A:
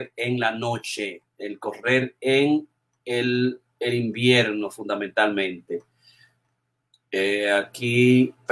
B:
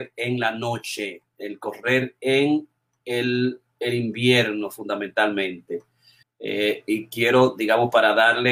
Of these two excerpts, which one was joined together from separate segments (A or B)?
B